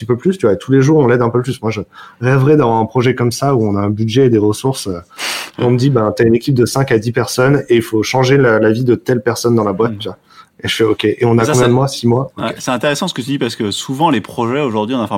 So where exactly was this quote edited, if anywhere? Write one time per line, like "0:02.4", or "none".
none